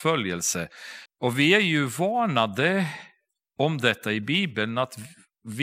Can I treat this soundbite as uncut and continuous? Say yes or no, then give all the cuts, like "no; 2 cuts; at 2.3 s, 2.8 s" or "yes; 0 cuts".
no; 1 cut; at 1.1 s